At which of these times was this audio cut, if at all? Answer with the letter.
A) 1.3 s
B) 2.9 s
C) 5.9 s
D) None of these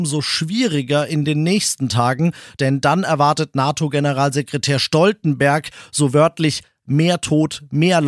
D